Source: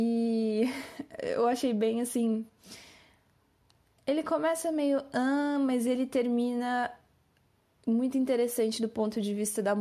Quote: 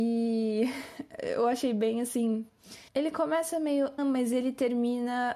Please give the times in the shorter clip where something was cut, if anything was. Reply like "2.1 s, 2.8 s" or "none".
2.9 s, 4.0 s